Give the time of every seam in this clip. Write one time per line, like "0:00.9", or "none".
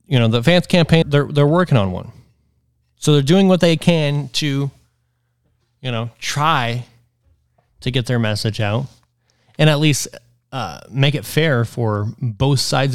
0:01.0